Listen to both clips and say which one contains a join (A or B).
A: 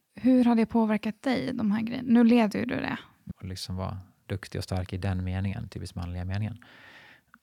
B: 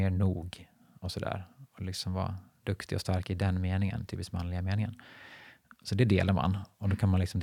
A